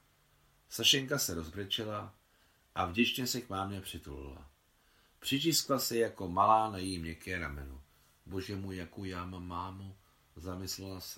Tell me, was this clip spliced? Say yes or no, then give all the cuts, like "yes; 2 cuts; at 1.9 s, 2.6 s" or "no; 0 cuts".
no; 0 cuts